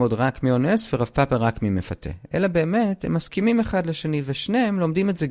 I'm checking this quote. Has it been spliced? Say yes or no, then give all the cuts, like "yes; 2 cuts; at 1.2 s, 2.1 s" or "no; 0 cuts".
no; 0 cuts